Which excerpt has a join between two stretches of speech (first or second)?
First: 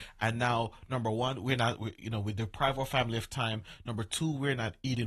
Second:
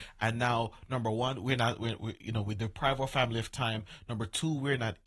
first